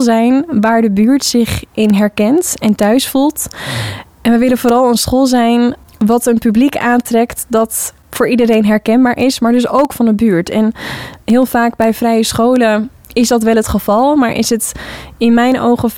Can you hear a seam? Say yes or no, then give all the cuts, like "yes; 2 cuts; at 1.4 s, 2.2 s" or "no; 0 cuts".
no; 0 cuts